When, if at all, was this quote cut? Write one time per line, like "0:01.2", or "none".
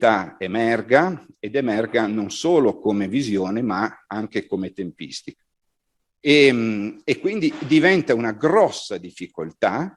0:06.1